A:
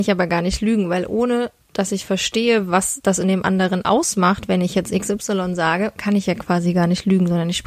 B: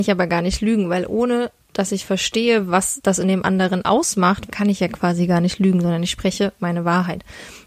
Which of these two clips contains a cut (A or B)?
B